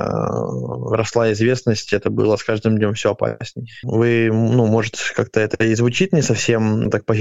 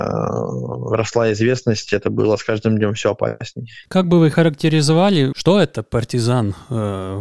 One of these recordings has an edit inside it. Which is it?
first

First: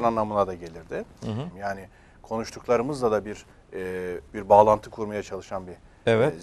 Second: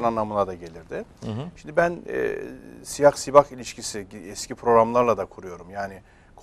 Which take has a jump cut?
first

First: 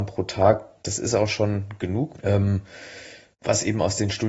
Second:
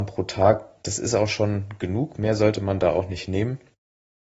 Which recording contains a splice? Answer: first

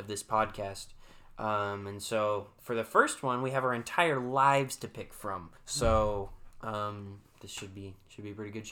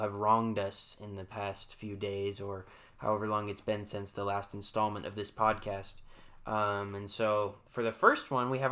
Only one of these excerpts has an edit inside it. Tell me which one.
first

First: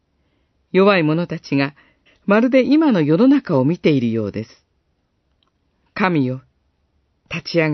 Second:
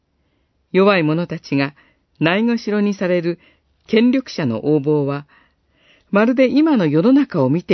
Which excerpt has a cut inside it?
first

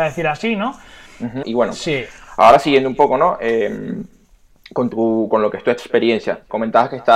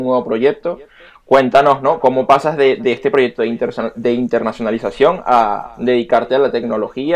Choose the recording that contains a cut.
first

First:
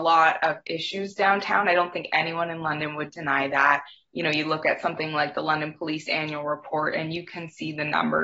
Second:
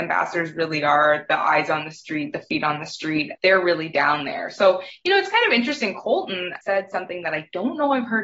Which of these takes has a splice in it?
second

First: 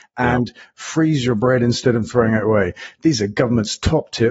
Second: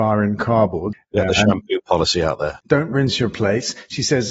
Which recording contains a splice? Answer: second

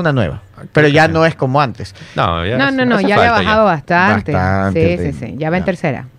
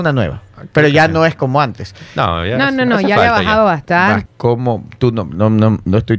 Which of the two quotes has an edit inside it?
second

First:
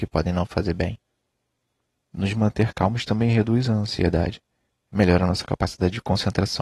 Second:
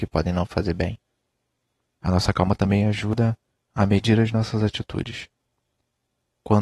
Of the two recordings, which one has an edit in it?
second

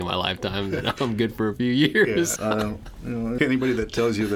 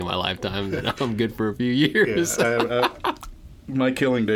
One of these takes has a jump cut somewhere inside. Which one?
first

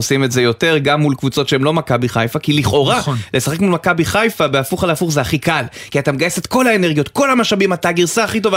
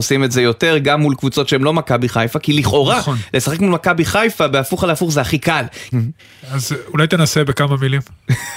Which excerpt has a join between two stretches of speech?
second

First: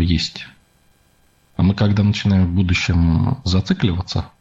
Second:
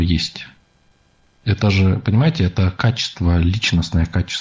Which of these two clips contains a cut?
second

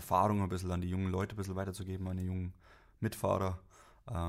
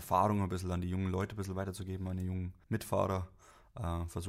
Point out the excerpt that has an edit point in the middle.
second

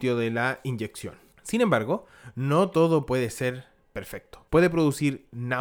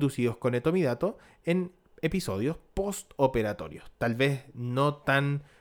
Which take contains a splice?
first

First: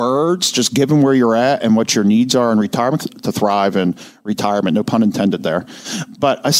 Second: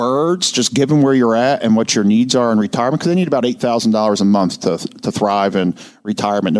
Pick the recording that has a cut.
first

